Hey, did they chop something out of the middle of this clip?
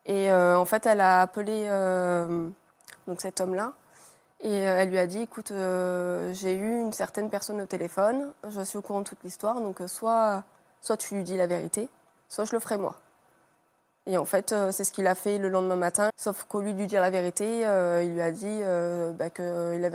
yes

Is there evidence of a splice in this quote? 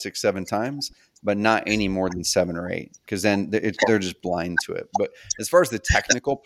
no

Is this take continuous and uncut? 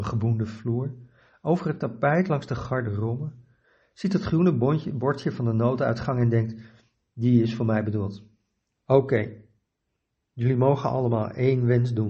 no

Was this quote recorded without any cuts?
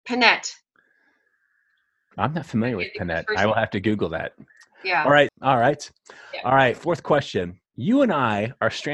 no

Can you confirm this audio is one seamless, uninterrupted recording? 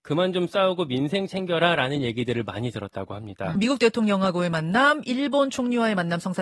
no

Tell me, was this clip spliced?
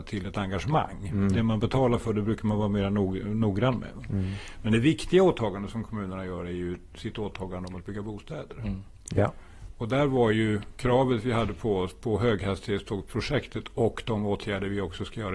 no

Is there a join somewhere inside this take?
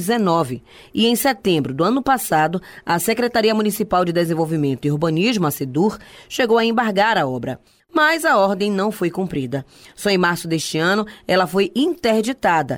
no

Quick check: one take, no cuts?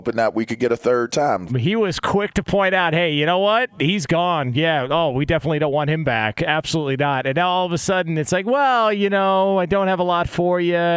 no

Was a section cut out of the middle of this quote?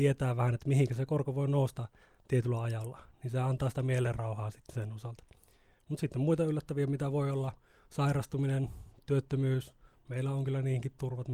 no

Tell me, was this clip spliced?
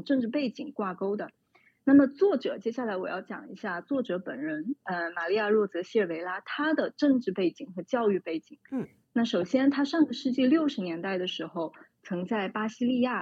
no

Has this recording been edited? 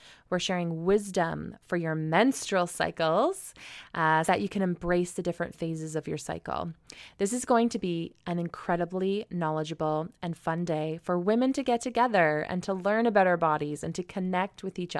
yes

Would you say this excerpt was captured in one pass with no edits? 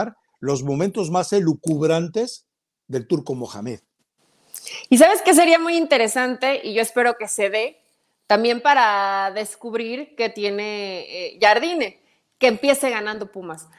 yes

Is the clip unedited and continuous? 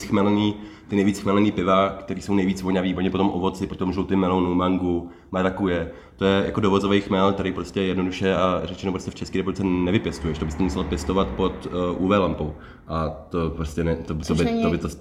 yes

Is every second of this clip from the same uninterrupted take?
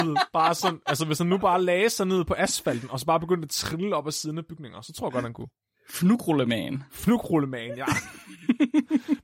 yes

